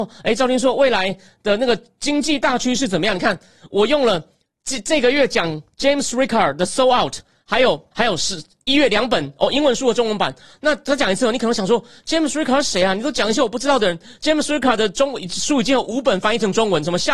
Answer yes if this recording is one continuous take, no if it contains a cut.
no